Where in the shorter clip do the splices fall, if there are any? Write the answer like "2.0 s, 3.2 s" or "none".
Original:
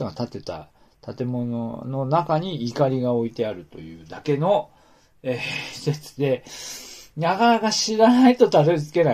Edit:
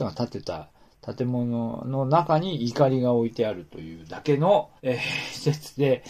4.8 s